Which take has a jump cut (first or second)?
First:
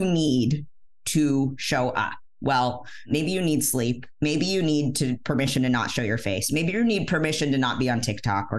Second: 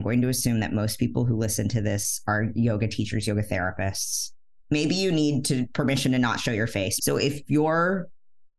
second